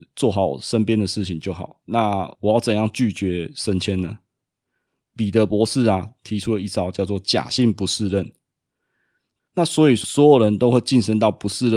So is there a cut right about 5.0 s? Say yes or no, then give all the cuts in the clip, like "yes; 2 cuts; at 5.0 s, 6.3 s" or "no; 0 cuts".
no; 2 cuts; at 1.8 s, 9.4 s